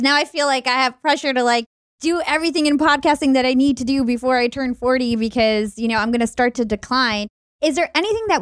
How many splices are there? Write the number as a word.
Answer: zero